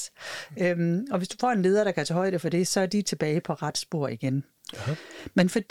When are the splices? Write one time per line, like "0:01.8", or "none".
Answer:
none